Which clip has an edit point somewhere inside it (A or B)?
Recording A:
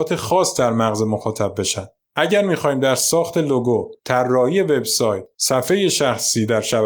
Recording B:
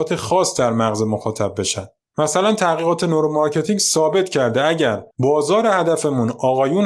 B